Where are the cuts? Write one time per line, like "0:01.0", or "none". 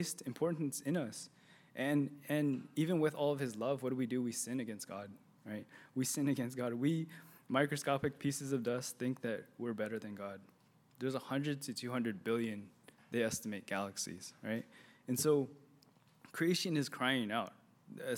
0:10.9